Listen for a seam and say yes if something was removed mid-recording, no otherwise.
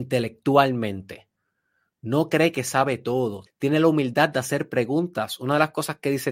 yes